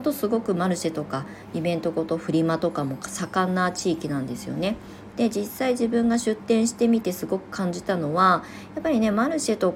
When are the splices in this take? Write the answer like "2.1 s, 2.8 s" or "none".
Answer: 5.1 s